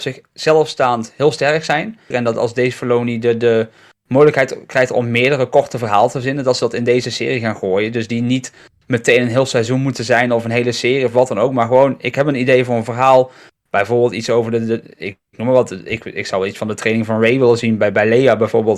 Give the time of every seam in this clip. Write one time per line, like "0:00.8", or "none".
0:02.1